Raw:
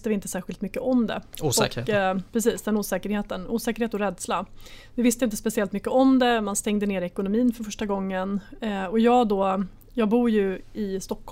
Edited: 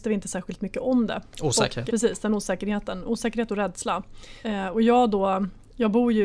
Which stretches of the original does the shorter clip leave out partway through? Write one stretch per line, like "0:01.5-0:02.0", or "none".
0:01.9-0:02.3
0:04.9-0:08.6